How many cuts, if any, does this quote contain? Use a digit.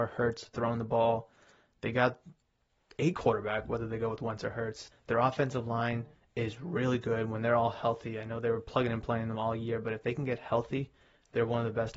1